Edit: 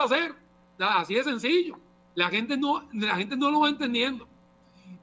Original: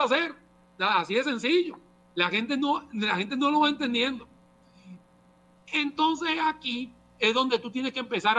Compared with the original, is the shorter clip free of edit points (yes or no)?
yes